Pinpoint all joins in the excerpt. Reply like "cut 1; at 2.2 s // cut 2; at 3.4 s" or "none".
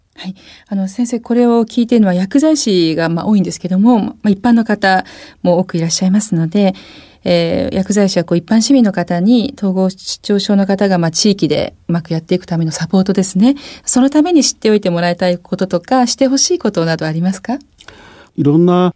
none

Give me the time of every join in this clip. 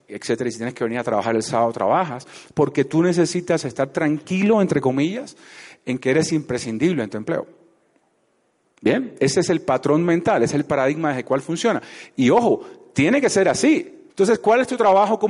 cut 1; at 14.1 s

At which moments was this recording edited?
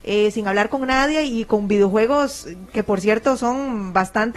none

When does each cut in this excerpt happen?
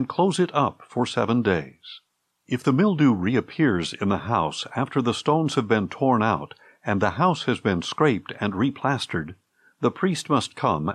cut 1; at 2.3 s

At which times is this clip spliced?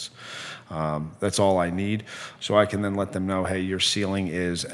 cut 1; at 2.4 s

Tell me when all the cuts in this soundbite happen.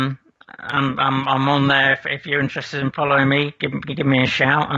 none

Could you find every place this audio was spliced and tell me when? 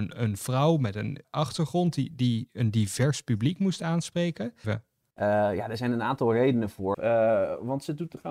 cut 1; at 1.2 s // cut 2; at 4.6 s // cut 3; at 6.9 s

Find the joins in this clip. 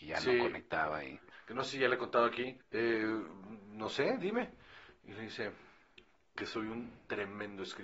cut 1; at 1.3 s // cut 2; at 2.6 s

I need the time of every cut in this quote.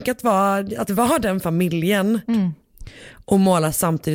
cut 1; at 2.2 s

